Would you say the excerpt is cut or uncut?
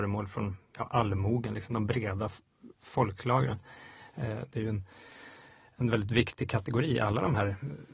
cut